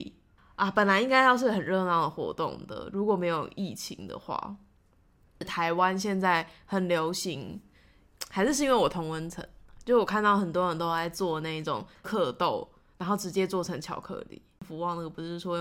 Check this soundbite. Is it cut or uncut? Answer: cut